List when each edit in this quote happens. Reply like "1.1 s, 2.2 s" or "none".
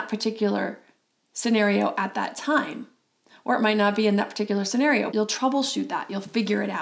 5.1 s